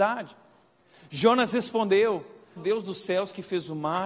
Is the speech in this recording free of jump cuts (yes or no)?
no